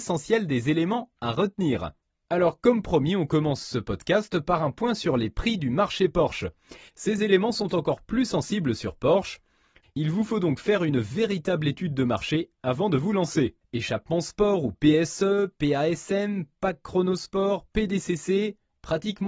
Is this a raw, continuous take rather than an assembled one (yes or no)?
no